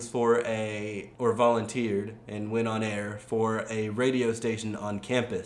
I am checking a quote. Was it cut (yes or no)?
yes